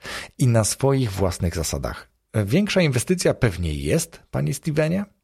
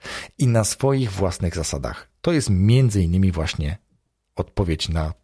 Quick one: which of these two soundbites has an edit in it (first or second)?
first